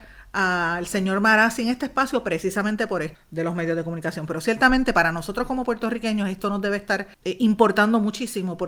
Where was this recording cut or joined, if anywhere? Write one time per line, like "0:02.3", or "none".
0:03.1
0:07.1